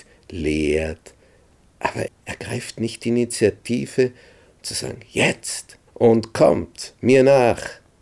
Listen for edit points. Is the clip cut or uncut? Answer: cut